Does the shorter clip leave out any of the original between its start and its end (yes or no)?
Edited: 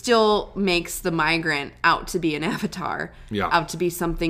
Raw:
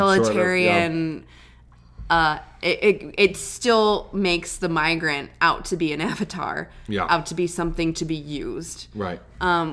no